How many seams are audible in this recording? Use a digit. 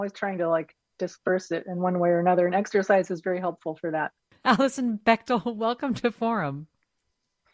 1